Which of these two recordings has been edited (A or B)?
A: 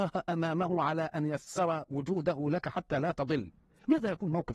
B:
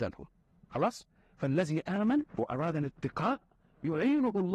B